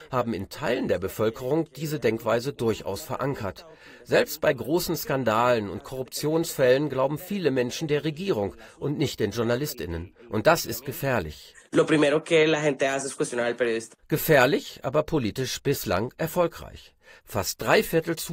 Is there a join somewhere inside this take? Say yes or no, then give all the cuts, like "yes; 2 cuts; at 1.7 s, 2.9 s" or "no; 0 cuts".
no; 0 cuts